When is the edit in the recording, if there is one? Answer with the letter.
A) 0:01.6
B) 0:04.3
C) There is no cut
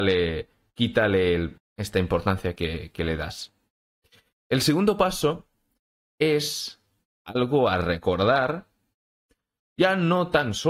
A